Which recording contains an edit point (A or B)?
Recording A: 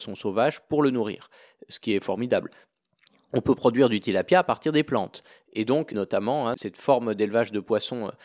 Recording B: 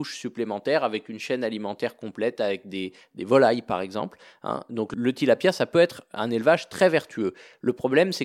A